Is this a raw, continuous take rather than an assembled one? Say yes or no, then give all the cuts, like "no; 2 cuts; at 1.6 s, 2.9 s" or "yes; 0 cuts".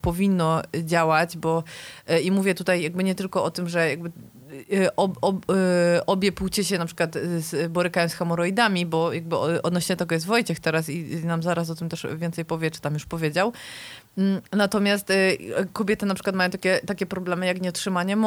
yes; 0 cuts